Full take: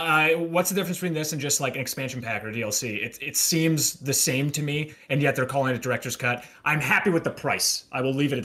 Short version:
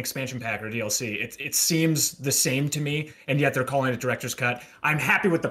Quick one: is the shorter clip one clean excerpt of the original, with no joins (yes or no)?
yes